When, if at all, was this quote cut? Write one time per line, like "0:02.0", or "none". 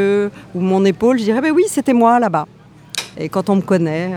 0:03.1